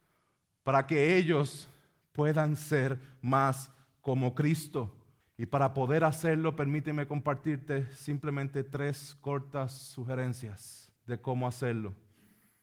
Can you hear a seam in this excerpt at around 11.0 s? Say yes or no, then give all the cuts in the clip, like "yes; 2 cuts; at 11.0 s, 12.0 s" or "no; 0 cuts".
yes; 2 cuts; at 5.2 s, 11.0 s